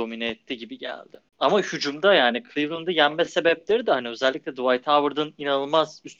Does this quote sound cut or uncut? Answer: cut